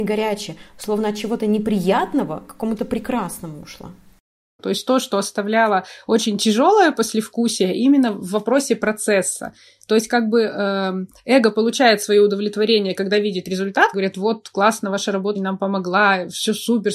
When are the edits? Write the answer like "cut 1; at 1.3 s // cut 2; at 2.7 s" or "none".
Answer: cut 1; at 4.6 s // cut 2; at 13.9 s // cut 3; at 15.3 s